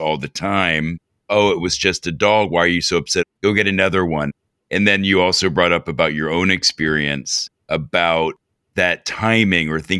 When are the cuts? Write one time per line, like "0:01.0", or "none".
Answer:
none